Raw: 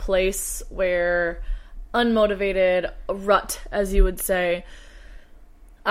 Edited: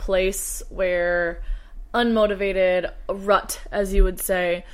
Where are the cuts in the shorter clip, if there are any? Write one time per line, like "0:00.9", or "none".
none